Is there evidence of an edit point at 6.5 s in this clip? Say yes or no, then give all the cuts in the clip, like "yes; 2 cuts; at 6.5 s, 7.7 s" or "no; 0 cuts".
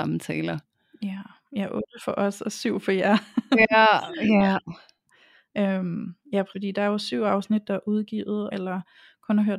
yes; 2 cuts; at 6.5 s, 8.5 s